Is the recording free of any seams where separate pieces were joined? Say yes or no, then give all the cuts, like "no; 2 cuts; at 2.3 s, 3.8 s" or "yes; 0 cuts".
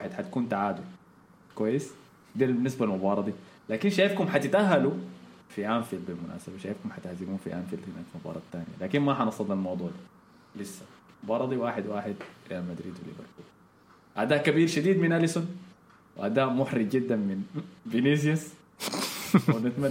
yes; 0 cuts